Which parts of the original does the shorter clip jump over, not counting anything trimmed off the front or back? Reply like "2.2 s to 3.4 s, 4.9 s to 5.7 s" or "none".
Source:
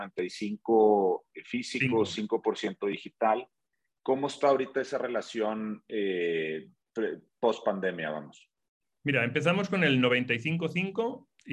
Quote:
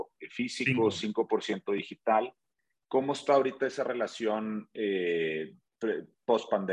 none